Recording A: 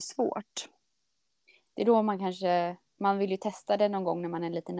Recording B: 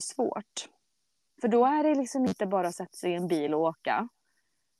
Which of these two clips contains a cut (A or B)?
B